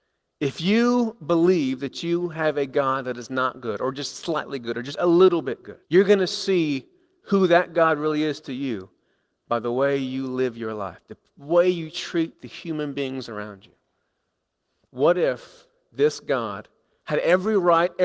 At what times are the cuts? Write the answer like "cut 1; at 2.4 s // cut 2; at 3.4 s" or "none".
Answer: cut 1; at 5.8 s // cut 2; at 14.8 s